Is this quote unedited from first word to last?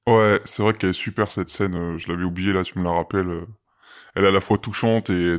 yes; 0 cuts

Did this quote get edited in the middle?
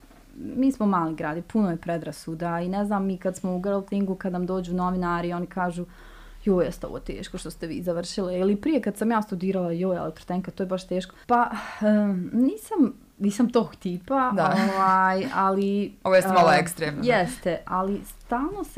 yes; 1 cut; at 11.2 s

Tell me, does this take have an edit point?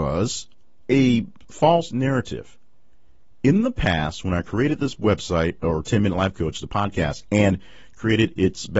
no; 0 cuts

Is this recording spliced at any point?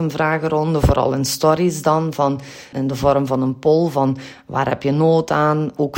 yes; 1 cut; at 2.7 s

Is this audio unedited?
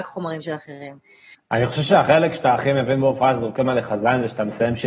no; 1 cut; at 1.3 s

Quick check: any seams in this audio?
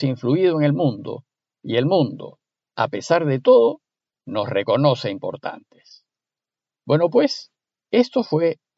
no; 0 cuts

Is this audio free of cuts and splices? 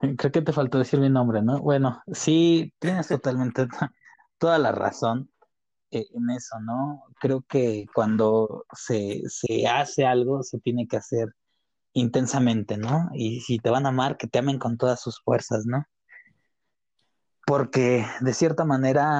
yes; 0 cuts

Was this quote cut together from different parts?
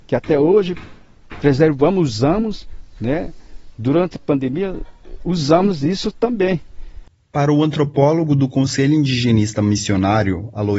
no; 0 cuts

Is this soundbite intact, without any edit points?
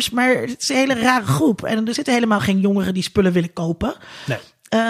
no; 1 cut; at 2.0 s

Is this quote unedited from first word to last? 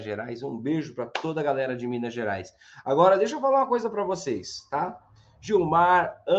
yes; 0 cuts

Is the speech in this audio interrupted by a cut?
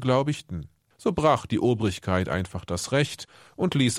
no; 0 cuts

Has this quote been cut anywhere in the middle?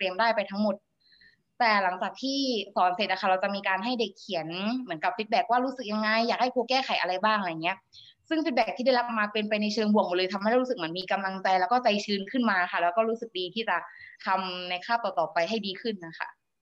yes; 1 cut; at 14.2 s

